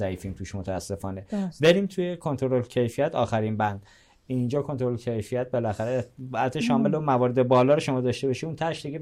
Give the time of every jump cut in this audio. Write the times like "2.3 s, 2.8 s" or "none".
none